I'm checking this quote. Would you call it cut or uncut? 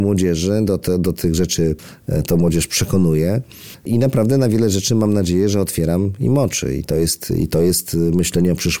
uncut